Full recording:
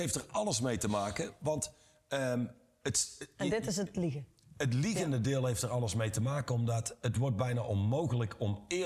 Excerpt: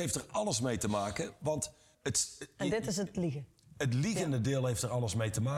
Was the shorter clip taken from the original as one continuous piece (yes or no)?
no